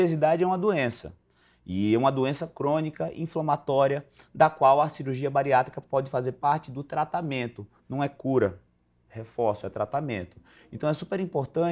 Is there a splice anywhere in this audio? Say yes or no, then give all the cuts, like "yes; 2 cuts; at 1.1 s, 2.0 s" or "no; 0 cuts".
no; 0 cuts